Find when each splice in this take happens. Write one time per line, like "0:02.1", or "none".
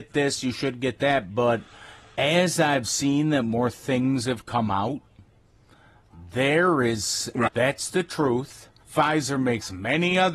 0:07.5
0:08.8